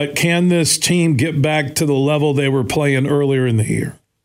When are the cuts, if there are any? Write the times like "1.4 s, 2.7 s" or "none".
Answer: none